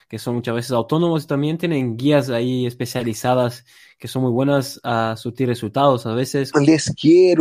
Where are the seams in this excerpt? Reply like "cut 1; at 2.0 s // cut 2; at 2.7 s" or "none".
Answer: cut 1; at 6.5 s

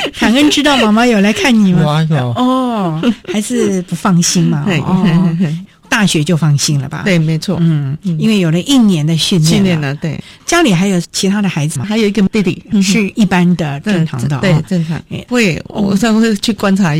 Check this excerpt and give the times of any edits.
cut 1; at 11.8 s // cut 2; at 15.3 s

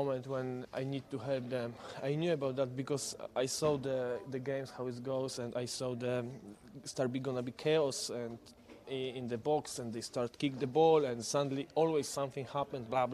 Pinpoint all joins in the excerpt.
cut 1; at 8.8 s

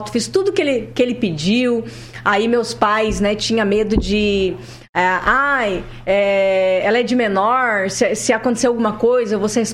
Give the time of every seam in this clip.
none

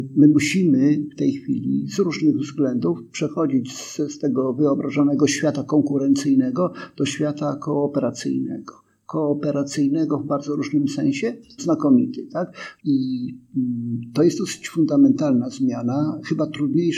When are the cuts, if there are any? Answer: cut 1; at 11.6 s // cut 2; at 12.8 s

